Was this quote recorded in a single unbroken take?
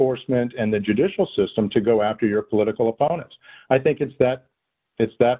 yes; 0 cuts

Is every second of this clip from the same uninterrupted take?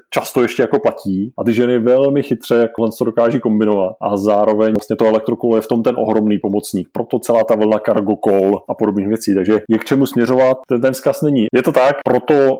no; 1 cut; at 11.5 s

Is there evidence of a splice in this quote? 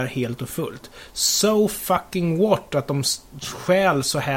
no; 0 cuts

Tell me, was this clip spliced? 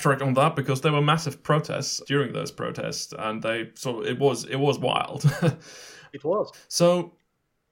yes; 2 cuts; at 2.0 s, 6.5 s

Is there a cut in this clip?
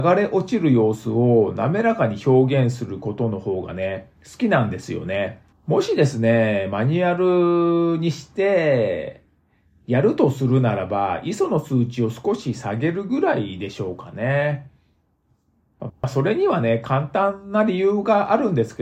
yes; 2 cuts; at 5.5 s, 15.9 s

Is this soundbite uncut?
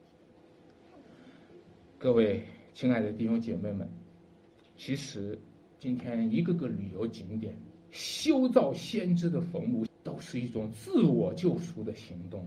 no; 1 cut; at 9.9 s

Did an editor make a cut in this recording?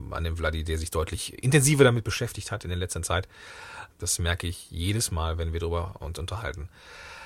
yes; 1 cut; at 3.9 s

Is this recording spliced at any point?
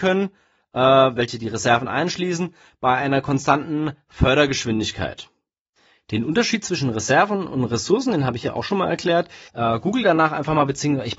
yes; 1 cut; at 9.5 s

